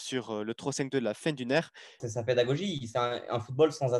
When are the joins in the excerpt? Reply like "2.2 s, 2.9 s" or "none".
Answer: 2.0 s